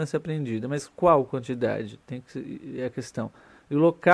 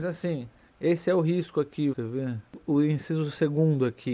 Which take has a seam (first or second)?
second